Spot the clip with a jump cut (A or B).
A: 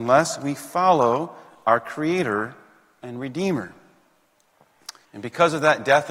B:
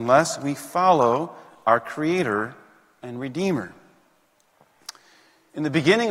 A